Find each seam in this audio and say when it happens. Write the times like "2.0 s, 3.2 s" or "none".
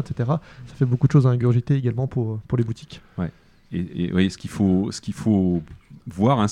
none